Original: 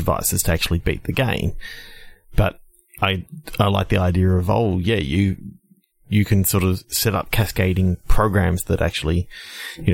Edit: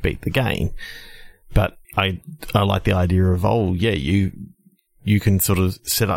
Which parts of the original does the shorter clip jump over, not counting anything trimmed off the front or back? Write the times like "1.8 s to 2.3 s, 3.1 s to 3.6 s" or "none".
2.7 s to 2.9 s